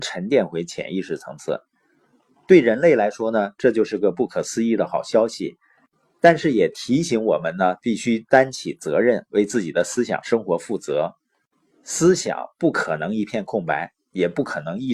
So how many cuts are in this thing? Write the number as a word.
zero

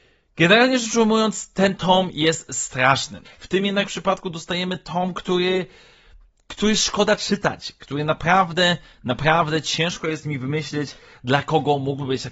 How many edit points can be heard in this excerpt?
two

